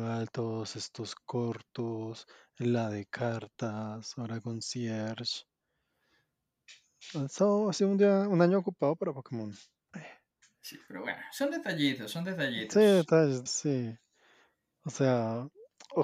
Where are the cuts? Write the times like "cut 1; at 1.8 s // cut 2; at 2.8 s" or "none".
cut 1; at 9.9 s // cut 2; at 13.5 s